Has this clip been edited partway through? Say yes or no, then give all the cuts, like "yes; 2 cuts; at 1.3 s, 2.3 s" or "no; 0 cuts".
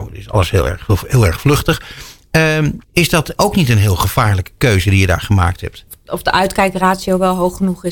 yes; 2 cuts; at 2.8 s, 5.9 s